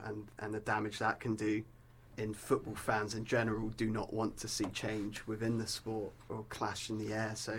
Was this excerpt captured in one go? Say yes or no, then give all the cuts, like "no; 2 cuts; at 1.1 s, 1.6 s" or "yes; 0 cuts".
no; 2 cuts; at 2.1 s, 6.3 s